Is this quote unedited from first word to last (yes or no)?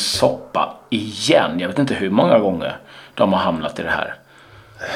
yes